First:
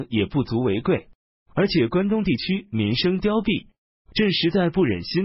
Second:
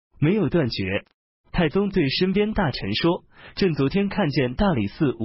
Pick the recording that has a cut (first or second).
second